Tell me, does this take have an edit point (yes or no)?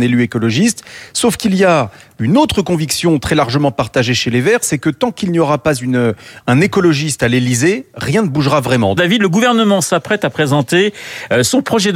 yes